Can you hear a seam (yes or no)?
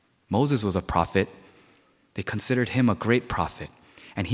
no